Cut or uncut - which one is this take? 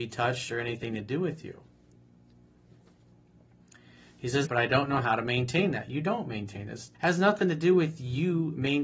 cut